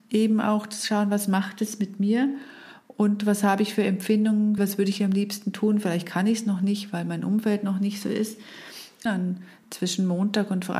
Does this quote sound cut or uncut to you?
cut